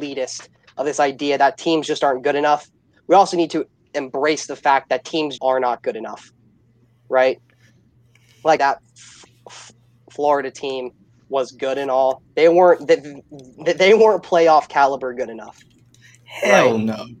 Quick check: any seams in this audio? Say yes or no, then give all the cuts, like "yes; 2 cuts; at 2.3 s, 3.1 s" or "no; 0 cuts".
yes; 2 cuts; at 5.4 s, 8.6 s